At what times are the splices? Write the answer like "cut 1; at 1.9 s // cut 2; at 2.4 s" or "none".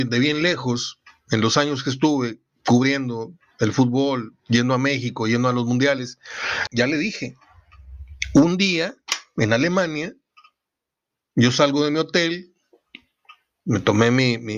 cut 1; at 6.7 s